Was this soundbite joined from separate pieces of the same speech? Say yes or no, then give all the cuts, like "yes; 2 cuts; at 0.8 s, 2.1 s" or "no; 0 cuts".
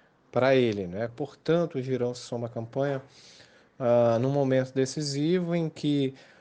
yes; 1 cut; at 1.1 s